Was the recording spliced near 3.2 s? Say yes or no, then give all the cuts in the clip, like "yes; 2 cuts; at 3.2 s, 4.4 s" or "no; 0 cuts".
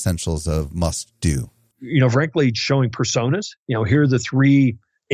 no; 1 cut; at 1.7 s